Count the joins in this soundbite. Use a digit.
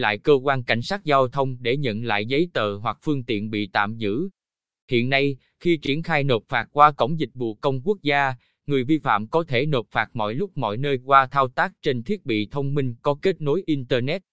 0